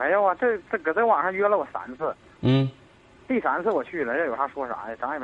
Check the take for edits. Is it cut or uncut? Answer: uncut